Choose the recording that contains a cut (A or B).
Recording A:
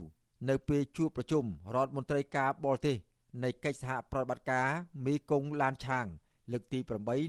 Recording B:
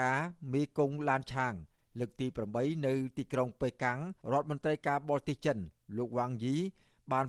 B